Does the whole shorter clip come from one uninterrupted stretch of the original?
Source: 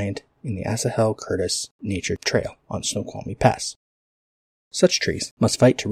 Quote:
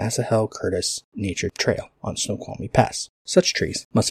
no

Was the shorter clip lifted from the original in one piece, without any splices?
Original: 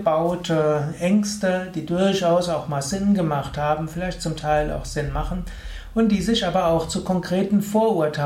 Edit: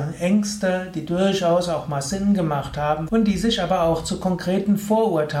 no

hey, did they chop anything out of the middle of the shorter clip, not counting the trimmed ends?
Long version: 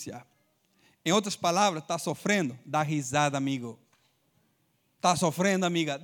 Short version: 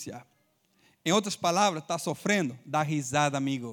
no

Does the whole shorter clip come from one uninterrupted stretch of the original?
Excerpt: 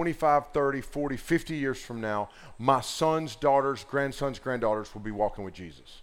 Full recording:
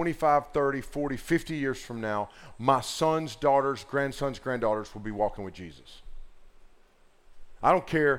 yes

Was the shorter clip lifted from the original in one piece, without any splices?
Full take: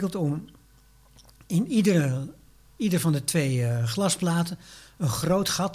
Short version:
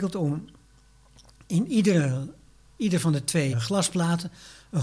no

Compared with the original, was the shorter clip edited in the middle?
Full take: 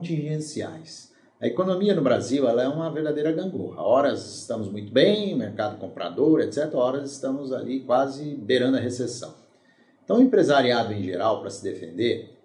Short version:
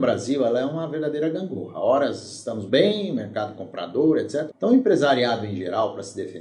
yes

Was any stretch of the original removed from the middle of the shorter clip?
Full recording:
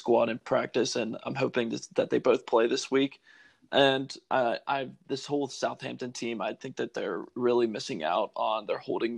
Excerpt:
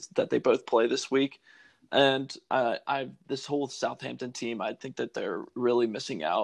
no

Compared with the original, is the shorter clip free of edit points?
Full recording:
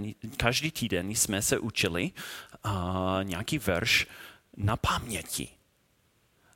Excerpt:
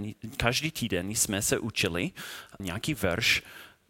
no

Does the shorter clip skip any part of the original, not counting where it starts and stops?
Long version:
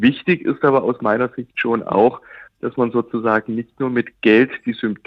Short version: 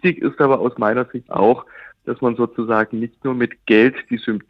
yes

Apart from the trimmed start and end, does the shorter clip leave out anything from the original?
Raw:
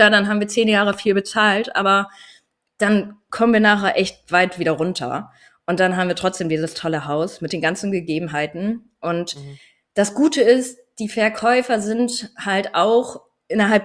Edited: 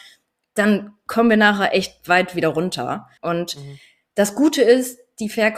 yes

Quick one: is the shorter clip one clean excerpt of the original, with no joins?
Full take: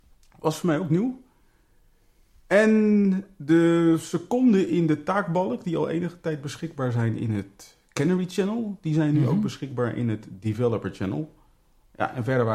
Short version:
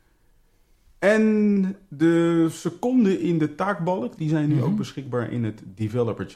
no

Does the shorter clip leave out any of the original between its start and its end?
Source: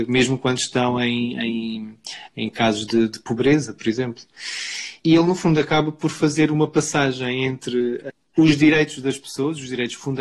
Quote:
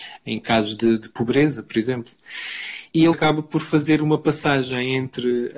yes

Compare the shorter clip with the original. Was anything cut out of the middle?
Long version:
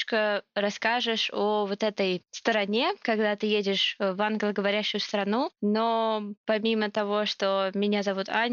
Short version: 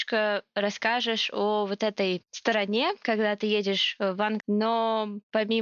yes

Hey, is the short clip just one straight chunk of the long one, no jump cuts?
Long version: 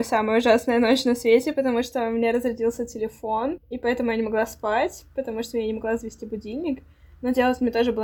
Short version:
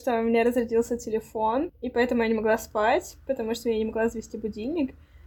yes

